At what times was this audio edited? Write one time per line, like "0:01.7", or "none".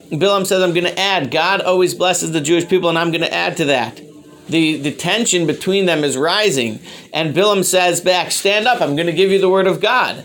0:04.5